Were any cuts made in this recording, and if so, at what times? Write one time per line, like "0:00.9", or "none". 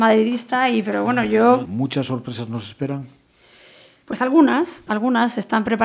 0:01.7